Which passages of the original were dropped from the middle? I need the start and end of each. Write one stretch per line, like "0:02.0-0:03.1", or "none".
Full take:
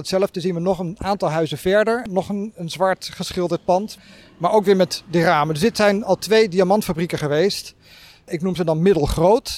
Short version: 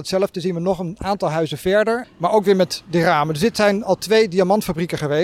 0:02.0-0:04.2